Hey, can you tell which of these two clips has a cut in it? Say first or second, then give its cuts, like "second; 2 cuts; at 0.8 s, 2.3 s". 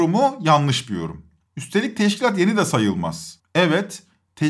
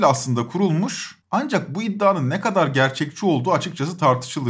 second; 1 cut; at 1.2 s